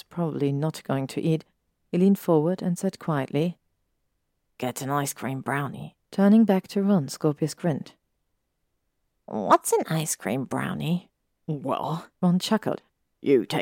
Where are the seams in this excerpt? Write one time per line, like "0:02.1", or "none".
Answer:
0:06.0
0:12.1